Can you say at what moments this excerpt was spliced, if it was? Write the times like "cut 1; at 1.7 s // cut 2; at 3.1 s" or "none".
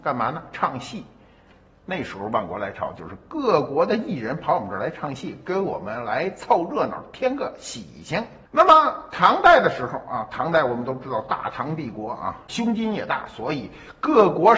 cut 1; at 8.4 s // cut 2; at 12.5 s